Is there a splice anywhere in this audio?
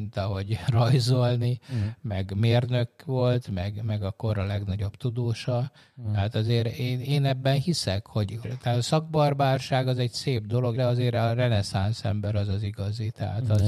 yes; 2 cuts; at 8.4 s, 10.7 s

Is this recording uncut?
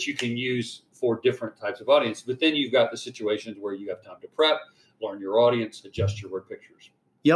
yes; 0 cuts

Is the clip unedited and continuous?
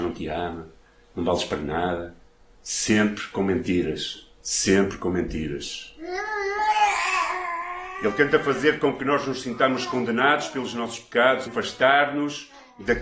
no; 1 cut; at 11.5 s

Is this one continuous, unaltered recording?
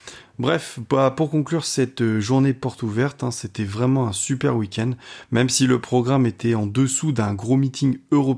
yes; 0 cuts

